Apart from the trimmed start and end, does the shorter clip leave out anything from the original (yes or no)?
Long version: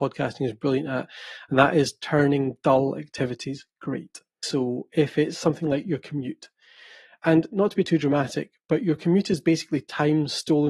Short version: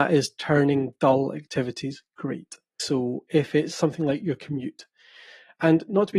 no